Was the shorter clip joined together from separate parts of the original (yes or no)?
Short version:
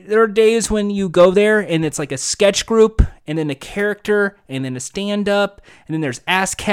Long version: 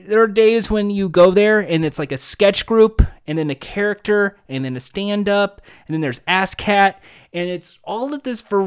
no